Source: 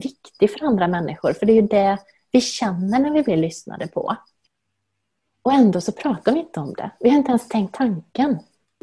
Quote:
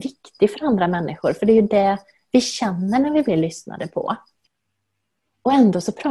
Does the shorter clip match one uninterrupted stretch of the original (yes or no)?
yes